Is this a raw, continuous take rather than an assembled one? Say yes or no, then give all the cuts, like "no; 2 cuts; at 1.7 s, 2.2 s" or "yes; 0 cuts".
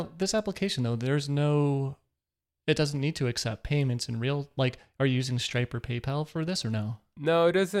yes; 0 cuts